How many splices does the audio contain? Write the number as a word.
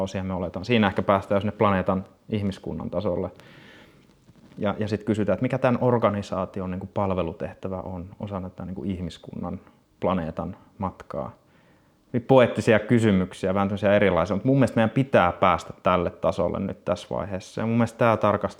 one